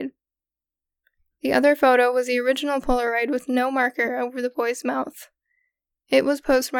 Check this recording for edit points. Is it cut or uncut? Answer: uncut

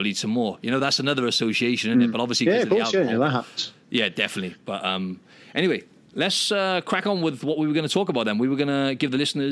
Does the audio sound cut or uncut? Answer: uncut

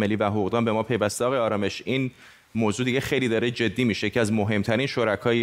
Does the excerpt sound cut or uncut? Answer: uncut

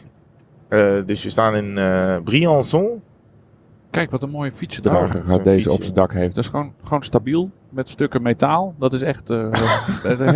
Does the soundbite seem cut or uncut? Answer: uncut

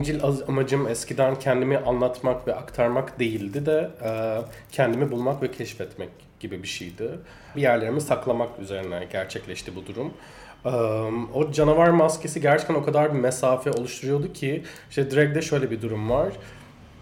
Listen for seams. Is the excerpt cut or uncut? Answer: cut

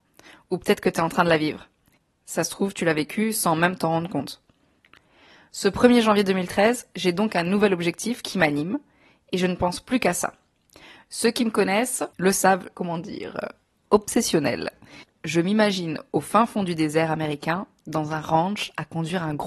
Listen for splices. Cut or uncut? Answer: cut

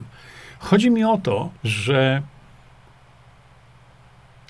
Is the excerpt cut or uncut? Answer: cut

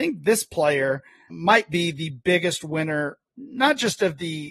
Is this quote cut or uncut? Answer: cut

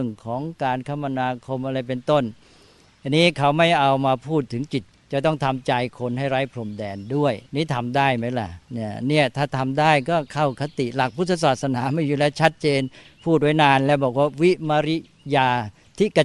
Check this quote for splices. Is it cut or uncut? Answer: cut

